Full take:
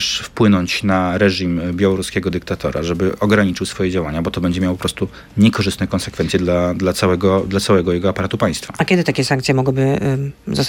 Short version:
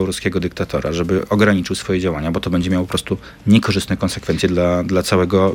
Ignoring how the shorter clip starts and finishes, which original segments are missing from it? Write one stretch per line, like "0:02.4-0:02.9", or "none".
none